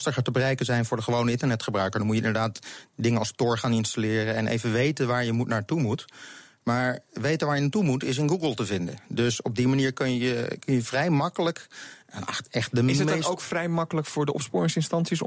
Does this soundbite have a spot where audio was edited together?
no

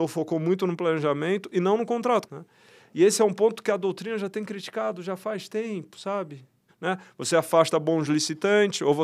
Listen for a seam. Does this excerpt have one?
yes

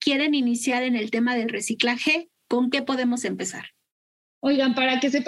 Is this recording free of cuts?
no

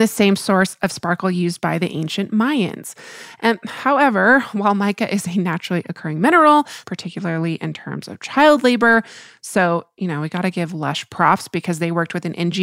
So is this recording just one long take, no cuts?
no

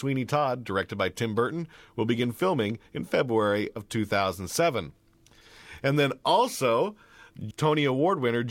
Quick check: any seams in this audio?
yes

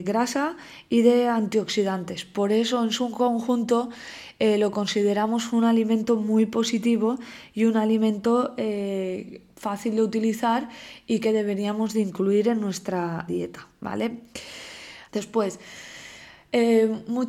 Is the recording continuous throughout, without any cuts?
no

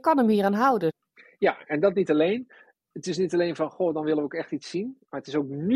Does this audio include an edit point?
no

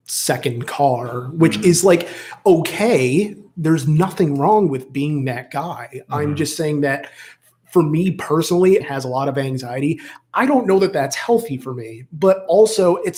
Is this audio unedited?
no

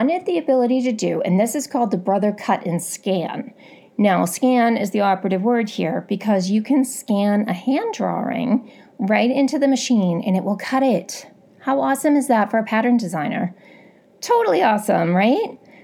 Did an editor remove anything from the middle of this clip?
no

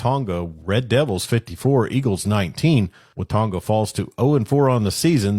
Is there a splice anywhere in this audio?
no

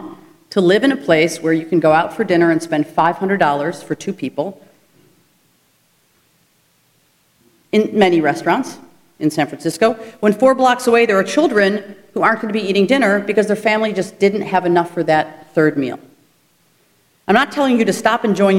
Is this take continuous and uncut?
yes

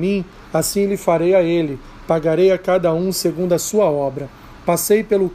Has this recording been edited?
no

